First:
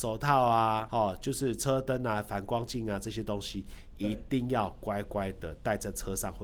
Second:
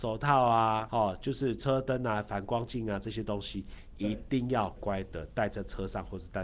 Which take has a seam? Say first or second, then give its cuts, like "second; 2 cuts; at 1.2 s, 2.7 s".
second; 1 cut; at 4.8 s